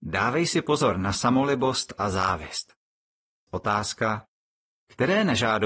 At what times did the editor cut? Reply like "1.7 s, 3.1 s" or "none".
3.5 s